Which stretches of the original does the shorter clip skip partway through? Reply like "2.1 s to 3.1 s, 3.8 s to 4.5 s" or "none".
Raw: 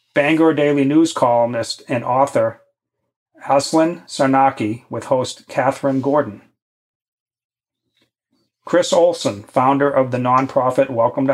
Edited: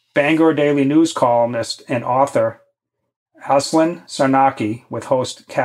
none